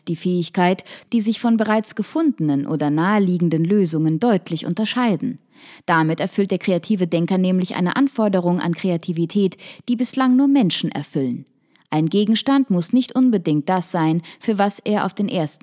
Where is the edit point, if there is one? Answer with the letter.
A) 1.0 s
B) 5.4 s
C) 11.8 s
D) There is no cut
A